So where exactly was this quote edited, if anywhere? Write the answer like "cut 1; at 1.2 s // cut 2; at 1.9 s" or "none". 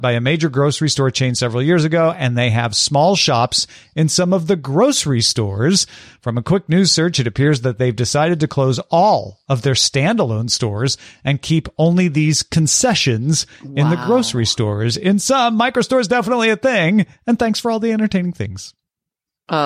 none

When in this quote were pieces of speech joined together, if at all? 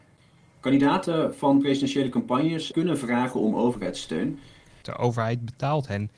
cut 1; at 2.7 s // cut 2; at 4.8 s

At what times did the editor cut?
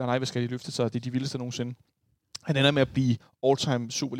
none

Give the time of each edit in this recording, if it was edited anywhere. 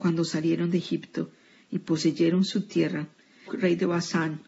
cut 1; at 3.5 s

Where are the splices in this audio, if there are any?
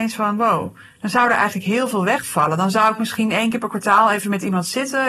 none

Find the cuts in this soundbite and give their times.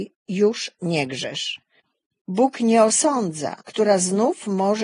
cut 1; at 2.2 s // cut 2; at 3.6 s

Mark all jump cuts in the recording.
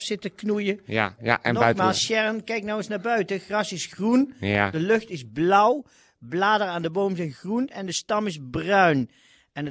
cut 1; at 1.2 s

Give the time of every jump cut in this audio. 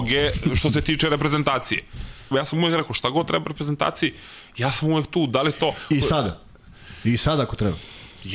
cut 1; at 2.3 s

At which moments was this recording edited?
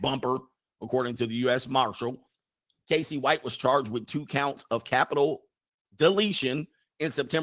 none

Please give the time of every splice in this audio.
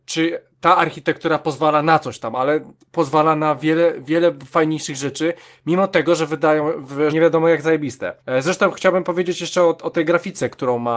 cut 1; at 7.1 s // cut 2; at 8.2 s

